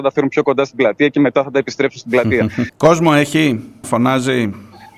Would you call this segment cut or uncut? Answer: cut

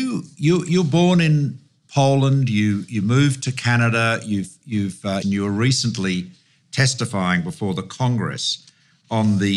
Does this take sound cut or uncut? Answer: cut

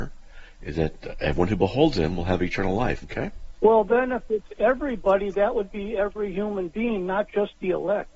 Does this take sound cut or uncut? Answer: cut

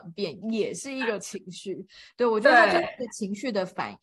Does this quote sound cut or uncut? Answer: uncut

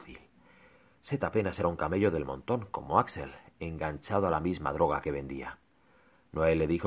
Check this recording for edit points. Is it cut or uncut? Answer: uncut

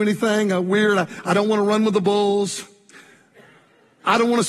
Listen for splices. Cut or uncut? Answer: uncut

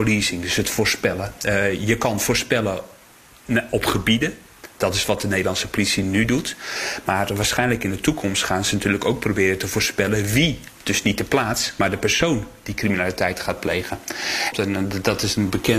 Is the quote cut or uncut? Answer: cut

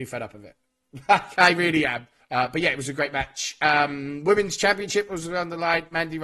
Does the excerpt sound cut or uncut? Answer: cut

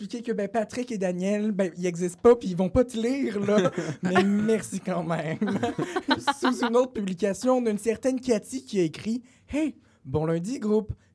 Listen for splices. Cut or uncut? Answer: uncut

